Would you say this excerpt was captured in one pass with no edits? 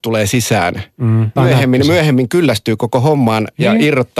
no; 1 cut; at 1.4 s

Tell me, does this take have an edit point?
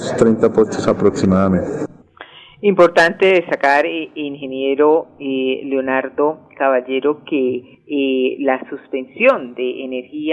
no; 0 cuts

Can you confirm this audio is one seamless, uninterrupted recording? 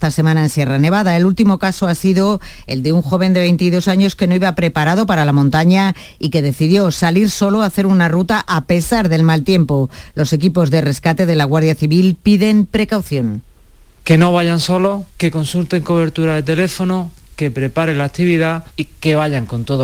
yes; 0 cuts

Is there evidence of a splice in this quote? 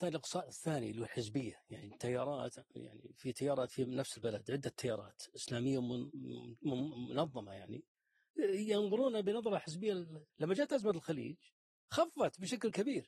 yes; 2 cuts; at 2.7 s, 10.3 s

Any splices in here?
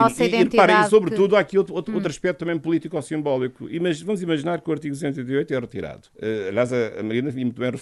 no; 0 cuts

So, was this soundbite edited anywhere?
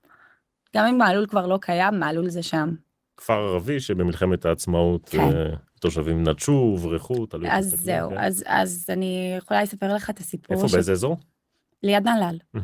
no; 0 cuts

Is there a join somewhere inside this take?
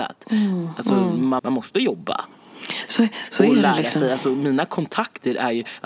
yes; 1 cut; at 1.4 s

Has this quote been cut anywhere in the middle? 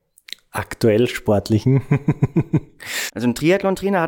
yes; 1 cut; at 3.1 s

